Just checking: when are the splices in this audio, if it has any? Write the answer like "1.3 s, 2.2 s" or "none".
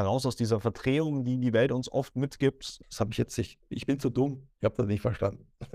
2.8 s